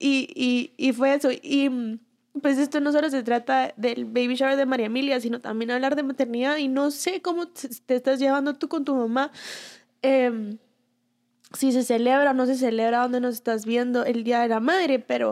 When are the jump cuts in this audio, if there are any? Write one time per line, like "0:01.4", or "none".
none